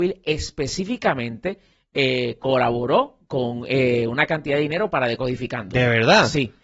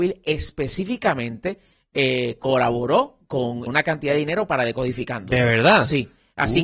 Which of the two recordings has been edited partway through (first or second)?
second